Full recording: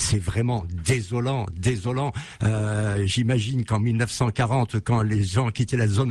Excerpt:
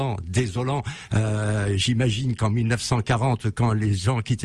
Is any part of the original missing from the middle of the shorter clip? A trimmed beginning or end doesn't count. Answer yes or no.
no